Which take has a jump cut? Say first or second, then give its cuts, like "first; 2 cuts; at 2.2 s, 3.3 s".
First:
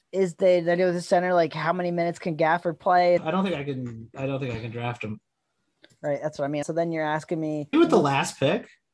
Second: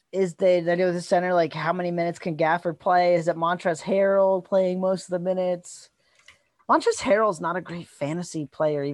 first; 3 cuts; at 3.2 s, 6.6 s, 7.7 s